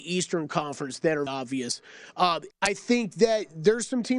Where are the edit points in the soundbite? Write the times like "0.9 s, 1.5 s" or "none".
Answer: 1.3 s, 2.5 s